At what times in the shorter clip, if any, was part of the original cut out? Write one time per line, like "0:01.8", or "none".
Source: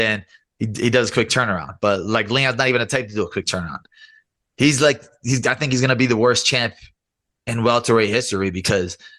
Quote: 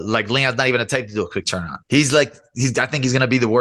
0:01.8